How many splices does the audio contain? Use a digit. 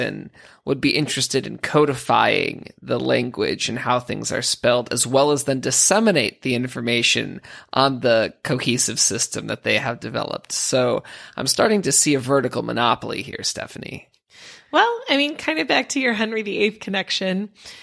0